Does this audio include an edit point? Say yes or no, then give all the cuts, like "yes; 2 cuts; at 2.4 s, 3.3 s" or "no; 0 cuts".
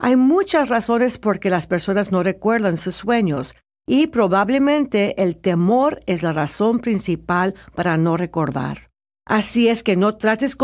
yes; 1 cut; at 9.1 s